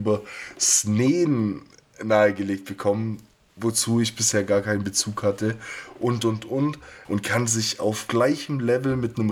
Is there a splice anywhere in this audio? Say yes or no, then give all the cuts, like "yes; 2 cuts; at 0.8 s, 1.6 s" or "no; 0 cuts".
yes; 1 cut; at 7.0 s